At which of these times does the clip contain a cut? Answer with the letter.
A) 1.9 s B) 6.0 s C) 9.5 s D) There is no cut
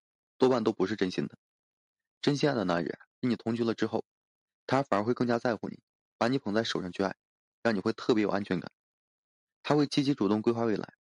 C